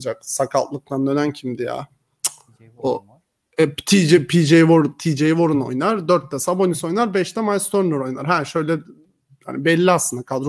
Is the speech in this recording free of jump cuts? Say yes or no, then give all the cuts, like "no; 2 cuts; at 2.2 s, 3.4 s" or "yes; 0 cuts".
yes; 0 cuts